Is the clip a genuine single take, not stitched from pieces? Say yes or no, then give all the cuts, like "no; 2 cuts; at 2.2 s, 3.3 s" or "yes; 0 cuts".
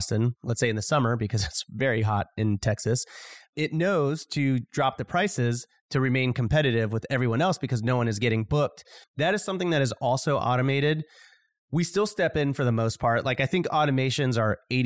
no; 1 cut; at 9.0 s